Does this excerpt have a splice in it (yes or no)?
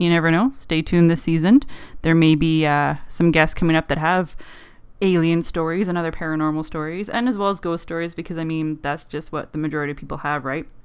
no